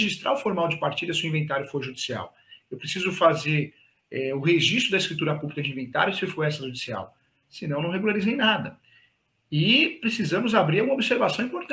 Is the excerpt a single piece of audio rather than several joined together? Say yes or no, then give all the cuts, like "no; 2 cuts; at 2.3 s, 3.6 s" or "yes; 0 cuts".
yes; 0 cuts